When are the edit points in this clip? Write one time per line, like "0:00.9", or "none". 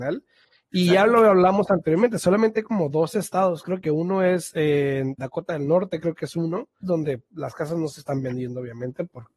0:05.2
0:06.8